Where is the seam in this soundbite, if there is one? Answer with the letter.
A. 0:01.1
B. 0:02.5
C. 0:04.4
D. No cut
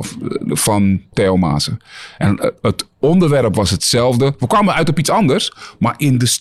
A